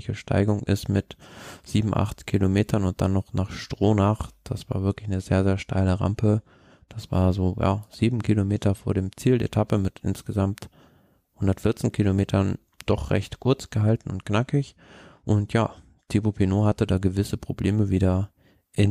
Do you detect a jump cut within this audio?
no; 0 cuts

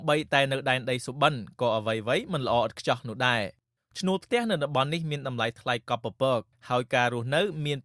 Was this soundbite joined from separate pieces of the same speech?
no; 0 cuts

